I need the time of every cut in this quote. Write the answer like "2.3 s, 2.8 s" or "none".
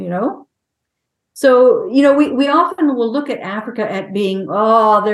none